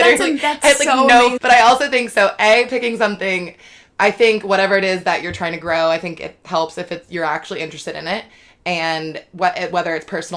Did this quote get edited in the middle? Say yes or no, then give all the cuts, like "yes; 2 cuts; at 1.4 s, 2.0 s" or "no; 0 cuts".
yes; 1 cut; at 1.4 s